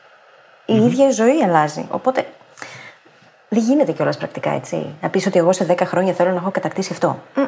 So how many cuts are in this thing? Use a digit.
0